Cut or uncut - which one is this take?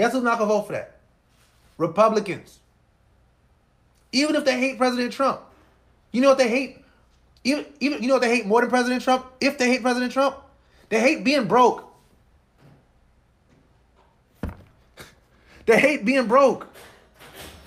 uncut